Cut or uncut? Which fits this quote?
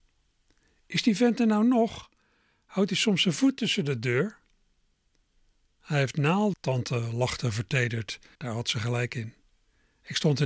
cut